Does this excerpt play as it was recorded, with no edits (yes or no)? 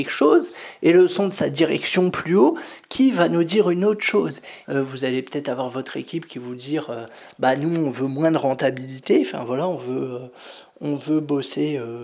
no